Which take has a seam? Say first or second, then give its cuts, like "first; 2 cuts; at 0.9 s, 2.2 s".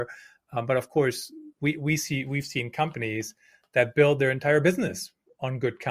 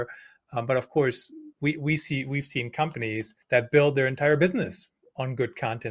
second; 1 cut; at 3.4 s